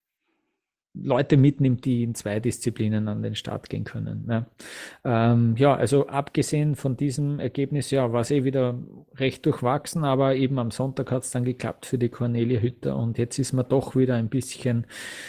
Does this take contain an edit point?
no; 0 cuts

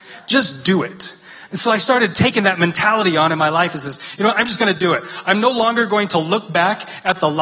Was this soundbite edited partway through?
no; 0 cuts

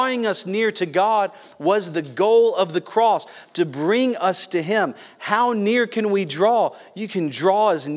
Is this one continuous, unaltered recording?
yes; 0 cuts

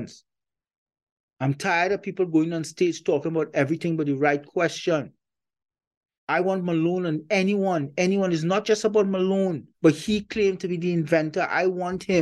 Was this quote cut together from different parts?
yes; 1 cut; at 9.7 s

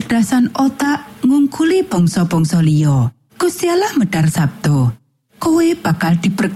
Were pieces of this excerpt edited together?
yes; 1 cut; at 3.3 s

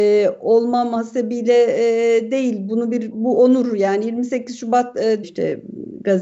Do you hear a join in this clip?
yes; 2 cuts; at 3.1 s, 5.2 s

